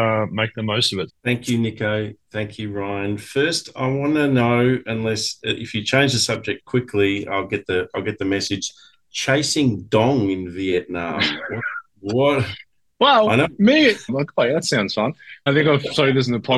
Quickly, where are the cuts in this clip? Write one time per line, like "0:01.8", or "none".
0:01.1
0:14.1
0:15.5